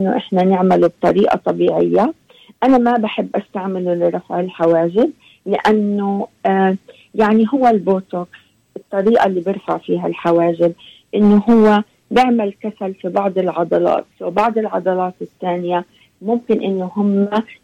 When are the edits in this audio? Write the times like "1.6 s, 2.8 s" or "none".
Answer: 14.1 s